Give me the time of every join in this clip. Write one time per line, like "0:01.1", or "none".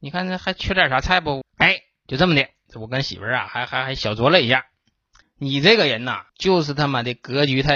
0:01.4
0:05.2
0:06.3